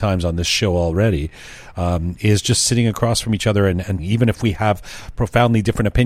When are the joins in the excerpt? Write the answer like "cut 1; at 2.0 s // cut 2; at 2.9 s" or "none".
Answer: cut 1; at 4.0 s